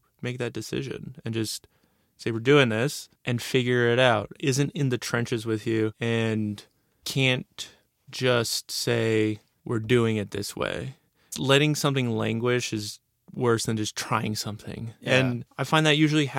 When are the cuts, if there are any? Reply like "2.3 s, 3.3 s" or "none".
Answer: 4.4 s, 15.0 s